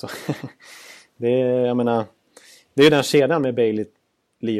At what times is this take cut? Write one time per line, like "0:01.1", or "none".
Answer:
none